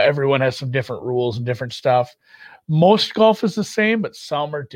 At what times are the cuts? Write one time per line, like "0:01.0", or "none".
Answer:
none